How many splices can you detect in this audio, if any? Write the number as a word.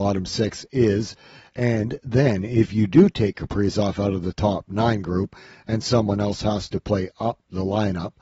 zero